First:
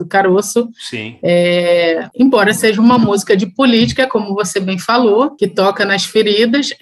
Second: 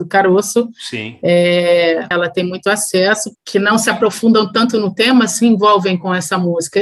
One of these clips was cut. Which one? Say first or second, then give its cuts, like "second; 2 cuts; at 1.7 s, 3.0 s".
second; 2 cuts; at 2.1 s, 3.4 s